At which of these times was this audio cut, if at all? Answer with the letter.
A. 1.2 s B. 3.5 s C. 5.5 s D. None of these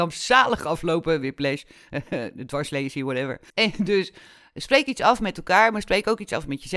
B